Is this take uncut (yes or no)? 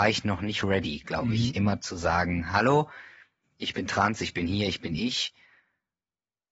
yes